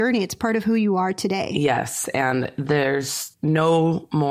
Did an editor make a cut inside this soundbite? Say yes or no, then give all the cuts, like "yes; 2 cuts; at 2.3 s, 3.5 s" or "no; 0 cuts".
no; 0 cuts